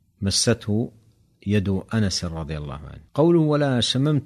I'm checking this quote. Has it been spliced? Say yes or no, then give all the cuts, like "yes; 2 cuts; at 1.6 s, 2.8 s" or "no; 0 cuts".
yes; 1 cut; at 3.1 s